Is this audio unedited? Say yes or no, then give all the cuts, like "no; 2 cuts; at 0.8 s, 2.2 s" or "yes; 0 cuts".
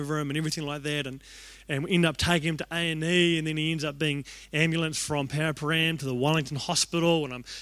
yes; 0 cuts